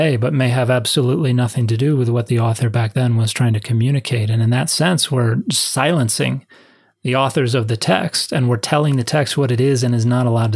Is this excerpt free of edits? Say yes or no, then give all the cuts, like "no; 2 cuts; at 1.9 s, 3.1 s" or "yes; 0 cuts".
yes; 0 cuts